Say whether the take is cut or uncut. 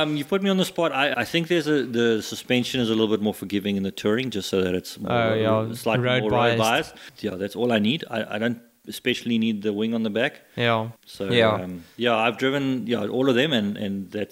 cut